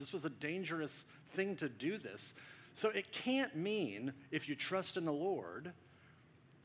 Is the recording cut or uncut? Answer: uncut